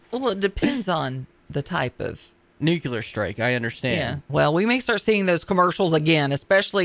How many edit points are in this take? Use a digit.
1